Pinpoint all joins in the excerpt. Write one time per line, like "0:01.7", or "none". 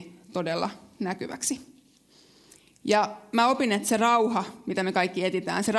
none